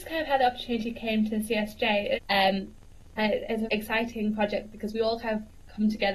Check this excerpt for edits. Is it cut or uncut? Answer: cut